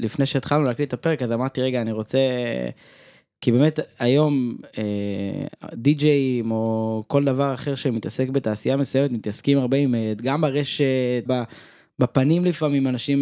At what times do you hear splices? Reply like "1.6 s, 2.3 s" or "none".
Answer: 10.2 s, 11.3 s